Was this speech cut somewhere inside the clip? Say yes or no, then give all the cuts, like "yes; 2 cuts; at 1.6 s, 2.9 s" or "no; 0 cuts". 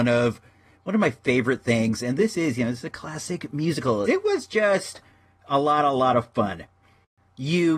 yes; 1 cut; at 4.0 s